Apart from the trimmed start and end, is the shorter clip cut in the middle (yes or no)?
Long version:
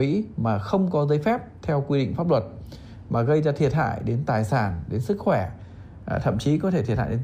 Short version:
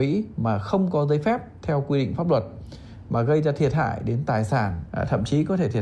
yes